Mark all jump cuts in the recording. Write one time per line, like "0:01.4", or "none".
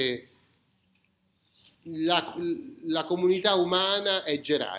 none